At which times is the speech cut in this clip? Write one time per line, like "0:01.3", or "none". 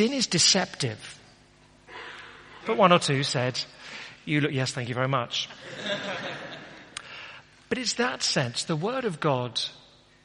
0:02.6